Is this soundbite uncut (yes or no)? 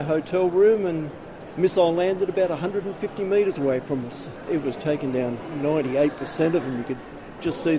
no